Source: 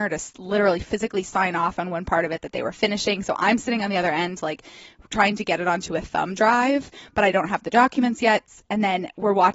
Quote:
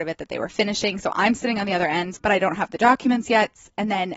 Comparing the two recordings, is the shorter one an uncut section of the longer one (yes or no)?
no